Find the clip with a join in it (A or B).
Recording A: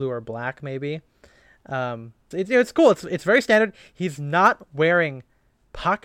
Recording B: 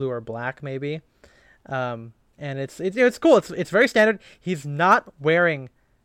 A